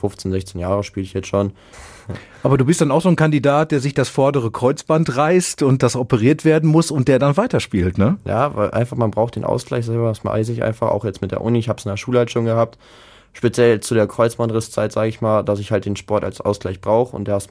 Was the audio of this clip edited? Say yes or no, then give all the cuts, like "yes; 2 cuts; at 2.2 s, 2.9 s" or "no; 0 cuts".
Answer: yes; 1 cut; at 1.7 s